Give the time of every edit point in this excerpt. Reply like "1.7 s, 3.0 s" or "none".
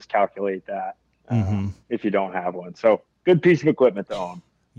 1.8 s

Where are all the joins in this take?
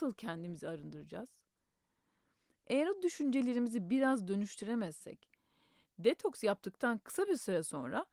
none

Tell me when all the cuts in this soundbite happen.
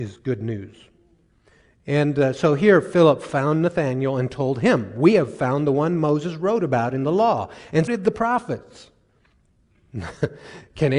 7.9 s, 9.5 s

